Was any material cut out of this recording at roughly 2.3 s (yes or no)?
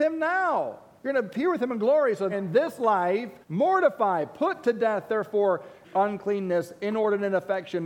yes